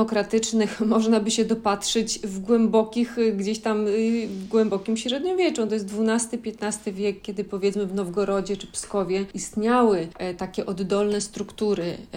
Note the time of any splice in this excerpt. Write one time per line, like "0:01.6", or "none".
none